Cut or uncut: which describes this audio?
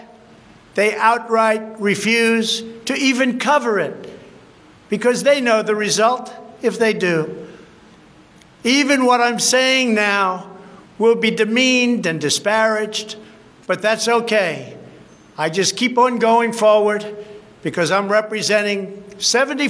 uncut